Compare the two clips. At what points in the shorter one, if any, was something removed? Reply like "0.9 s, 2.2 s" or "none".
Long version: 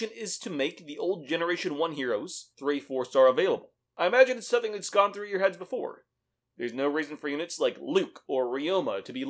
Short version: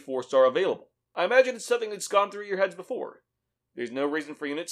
none